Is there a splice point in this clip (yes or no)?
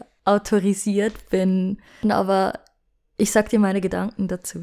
yes